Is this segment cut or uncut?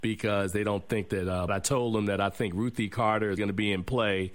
cut